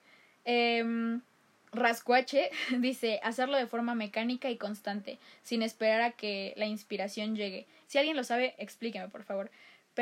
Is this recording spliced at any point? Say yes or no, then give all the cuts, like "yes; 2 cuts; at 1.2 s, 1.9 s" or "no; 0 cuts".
yes; 1 cut; at 7.8 s